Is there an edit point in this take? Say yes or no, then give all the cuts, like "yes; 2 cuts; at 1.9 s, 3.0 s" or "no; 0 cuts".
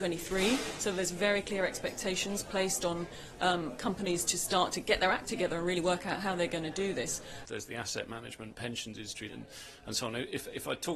yes; 2 cuts; at 7.4 s, 9.3 s